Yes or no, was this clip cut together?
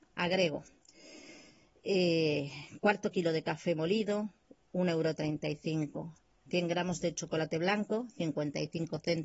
no